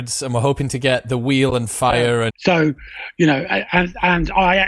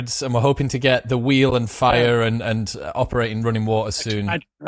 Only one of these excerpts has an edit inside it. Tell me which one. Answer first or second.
first